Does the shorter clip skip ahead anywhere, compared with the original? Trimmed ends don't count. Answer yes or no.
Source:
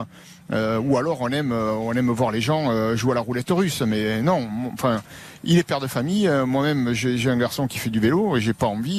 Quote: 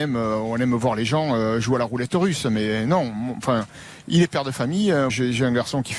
yes